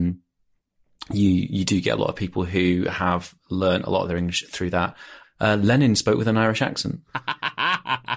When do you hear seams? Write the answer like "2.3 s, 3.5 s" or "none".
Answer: 5.2 s, 7.1 s